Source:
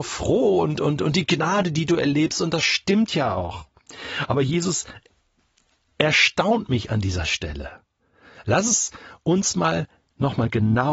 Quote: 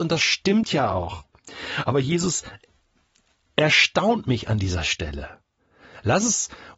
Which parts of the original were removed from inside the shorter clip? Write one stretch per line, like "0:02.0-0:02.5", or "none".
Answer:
none